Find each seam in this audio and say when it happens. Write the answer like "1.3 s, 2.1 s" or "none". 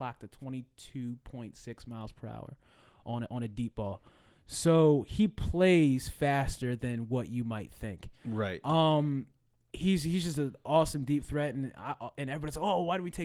none